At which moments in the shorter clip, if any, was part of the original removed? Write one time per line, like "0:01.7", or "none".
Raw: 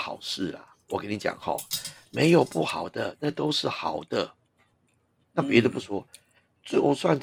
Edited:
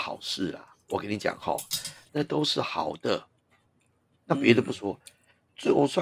0:02.1